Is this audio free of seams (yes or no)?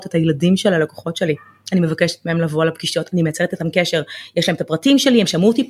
no